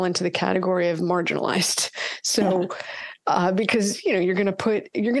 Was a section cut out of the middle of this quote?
no; 0 cuts

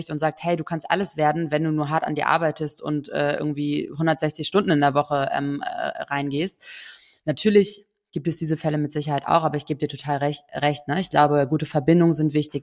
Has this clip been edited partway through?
no; 0 cuts

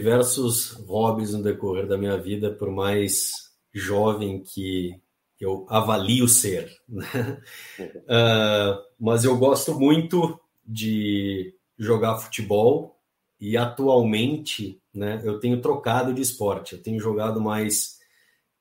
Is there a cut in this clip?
yes; 1 cut; at 3.6 s

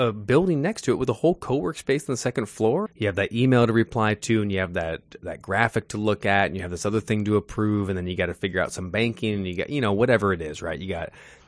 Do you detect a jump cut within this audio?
yes; 1 cut; at 2.9 s

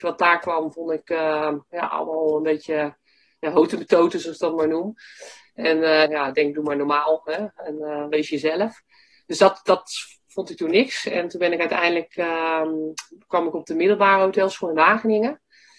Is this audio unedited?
no; 1 cut; at 6.1 s

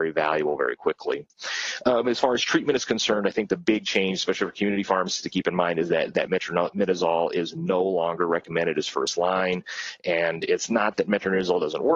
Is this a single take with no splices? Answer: yes; 0 cuts

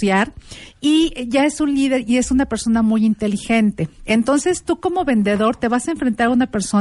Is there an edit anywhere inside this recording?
no; 0 cuts

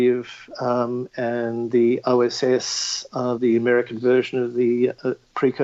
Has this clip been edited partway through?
no; 0 cuts

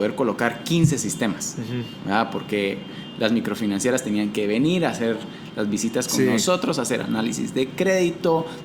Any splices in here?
no; 0 cuts

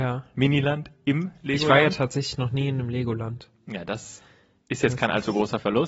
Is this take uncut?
yes; 0 cuts

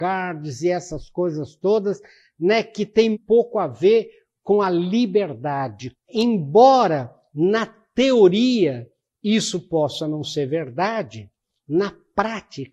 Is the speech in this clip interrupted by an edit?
yes; 2 cuts; at 3.1 s, 5.9 s

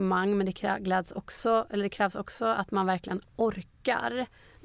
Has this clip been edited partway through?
no; 0 cuts

